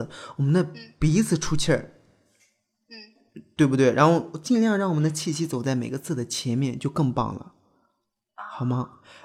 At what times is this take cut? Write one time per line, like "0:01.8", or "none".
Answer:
none